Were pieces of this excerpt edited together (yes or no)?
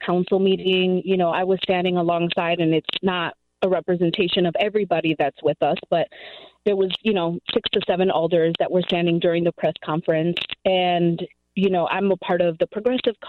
no